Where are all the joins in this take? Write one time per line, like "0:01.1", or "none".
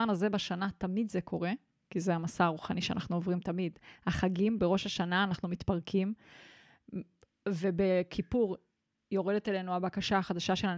none